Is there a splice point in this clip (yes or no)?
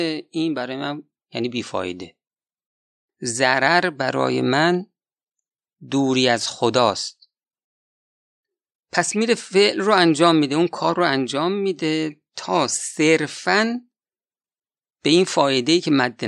no